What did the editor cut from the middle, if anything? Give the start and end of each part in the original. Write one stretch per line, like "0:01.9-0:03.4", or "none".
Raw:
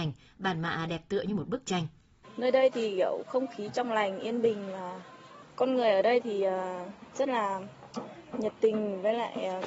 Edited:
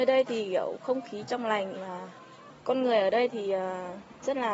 0:04.2-0:04.7